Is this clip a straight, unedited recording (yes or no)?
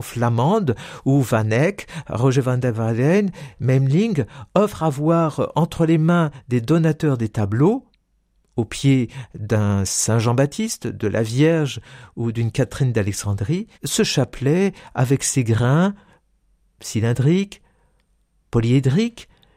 no